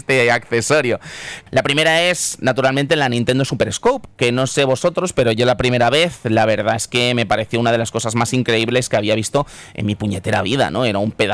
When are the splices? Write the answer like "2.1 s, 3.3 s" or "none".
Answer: 1.5 s